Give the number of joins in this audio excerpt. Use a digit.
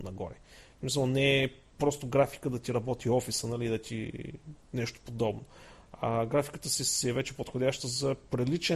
0